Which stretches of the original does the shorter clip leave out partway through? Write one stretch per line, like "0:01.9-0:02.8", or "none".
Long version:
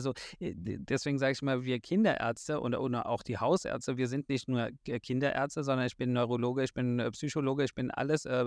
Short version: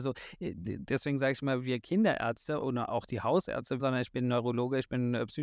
0:02.6-0:02.8
0:04.0-0:05.6